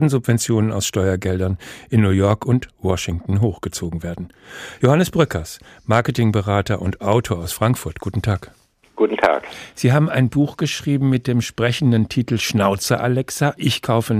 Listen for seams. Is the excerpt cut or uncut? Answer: uncut